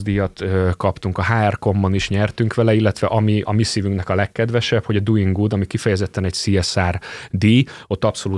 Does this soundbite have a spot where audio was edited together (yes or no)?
no